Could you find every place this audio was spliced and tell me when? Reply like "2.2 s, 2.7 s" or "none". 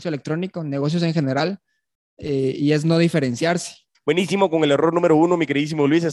3.9 s